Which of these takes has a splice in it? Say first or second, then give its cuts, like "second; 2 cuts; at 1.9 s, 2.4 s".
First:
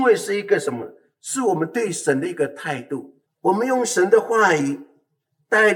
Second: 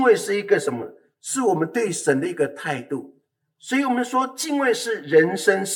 first; 1 cut; at 3.3 s